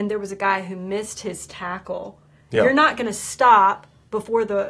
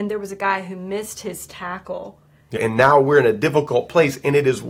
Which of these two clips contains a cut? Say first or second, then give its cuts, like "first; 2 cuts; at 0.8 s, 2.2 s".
second; 1 cut; at 2.6 s